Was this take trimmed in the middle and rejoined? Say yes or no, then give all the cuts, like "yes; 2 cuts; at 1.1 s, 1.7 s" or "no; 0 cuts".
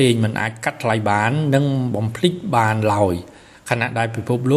no; 0 cuts